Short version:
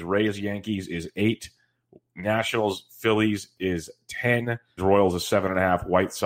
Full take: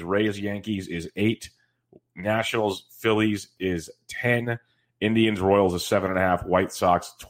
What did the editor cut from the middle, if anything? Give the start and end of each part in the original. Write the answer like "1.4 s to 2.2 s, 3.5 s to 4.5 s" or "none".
4.8 s to 5.4 s